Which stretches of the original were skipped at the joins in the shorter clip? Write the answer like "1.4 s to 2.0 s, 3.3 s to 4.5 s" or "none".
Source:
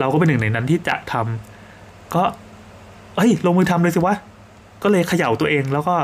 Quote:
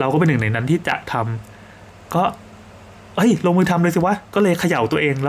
4.2 s to 4.7 s